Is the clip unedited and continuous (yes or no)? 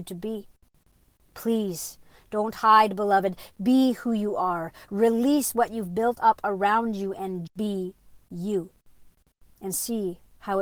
no